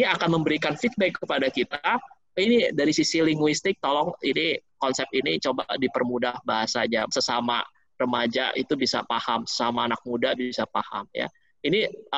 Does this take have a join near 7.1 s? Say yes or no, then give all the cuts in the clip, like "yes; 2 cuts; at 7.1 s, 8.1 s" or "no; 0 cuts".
yes; 1 cut; at 7.1 s